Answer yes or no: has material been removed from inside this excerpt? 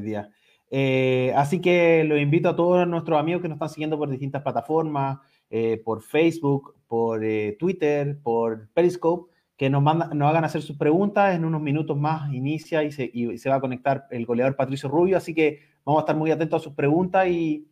no